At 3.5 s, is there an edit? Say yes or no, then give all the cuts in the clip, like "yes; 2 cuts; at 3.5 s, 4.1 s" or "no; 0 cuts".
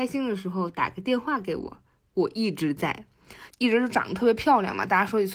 yes; 1 cut; at 3.5 s